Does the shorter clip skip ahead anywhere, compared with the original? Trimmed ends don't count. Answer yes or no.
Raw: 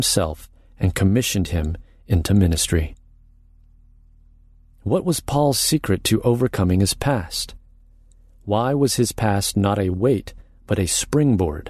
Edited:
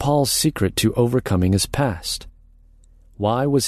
no